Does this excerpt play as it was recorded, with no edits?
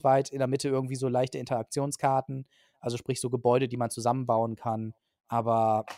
yes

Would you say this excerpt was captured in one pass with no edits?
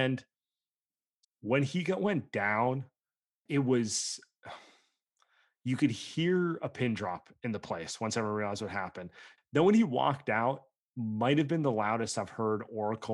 no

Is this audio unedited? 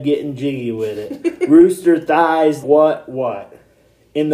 no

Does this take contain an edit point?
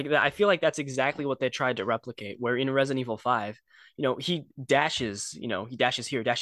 no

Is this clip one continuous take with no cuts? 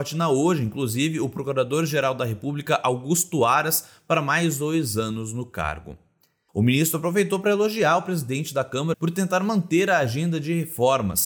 no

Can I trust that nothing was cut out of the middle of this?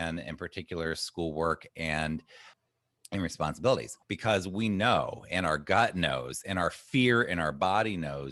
no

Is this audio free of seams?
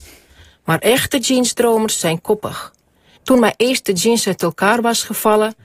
no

